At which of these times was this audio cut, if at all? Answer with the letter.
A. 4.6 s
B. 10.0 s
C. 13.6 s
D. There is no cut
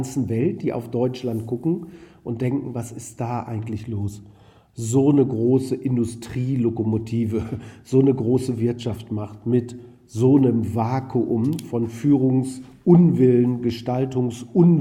D